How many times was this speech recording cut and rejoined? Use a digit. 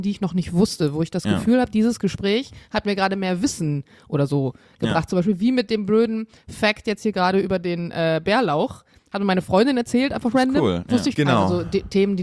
1